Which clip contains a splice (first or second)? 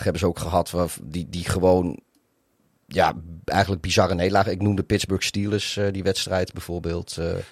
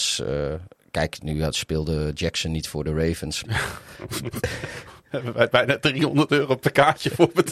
second